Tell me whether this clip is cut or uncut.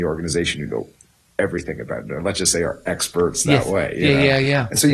uncut